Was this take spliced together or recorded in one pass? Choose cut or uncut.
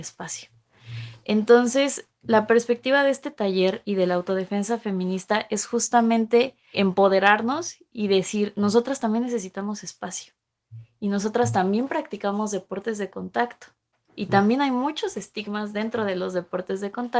cut